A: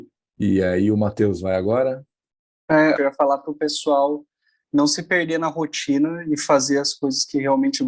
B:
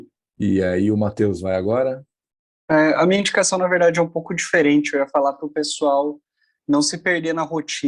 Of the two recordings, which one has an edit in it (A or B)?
A